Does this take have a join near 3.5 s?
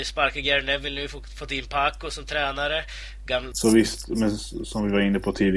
yes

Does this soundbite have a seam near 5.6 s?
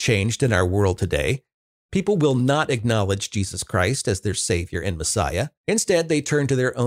yes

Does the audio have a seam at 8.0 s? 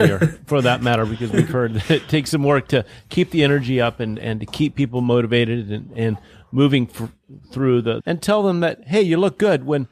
yes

